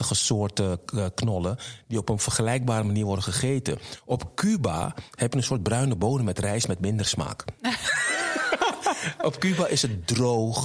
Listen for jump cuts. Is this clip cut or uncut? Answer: uncut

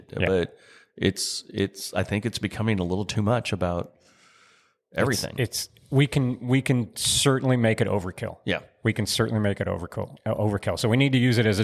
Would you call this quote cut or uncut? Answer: uncut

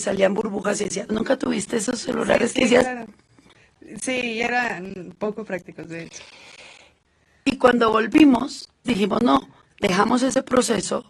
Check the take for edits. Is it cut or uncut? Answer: cut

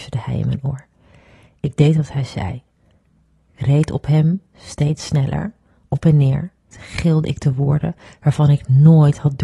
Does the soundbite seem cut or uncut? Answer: cut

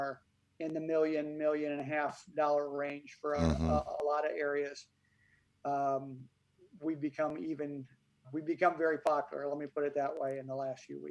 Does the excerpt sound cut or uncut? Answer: cut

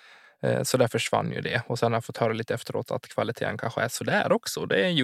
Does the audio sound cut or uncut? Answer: uncut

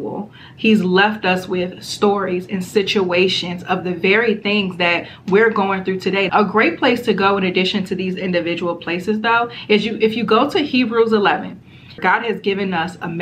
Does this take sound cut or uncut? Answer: cut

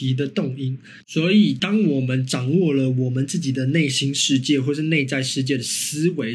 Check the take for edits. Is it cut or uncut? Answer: cut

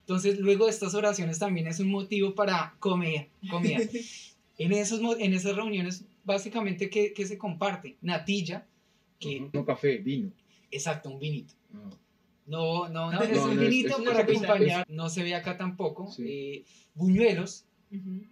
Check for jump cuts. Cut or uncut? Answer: cut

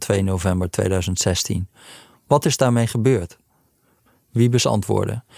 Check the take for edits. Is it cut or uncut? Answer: uncut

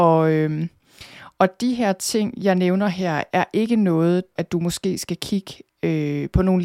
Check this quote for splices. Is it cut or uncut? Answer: cut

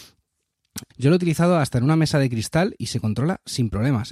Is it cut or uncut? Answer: cut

